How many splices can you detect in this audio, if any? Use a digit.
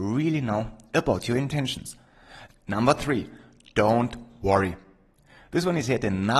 1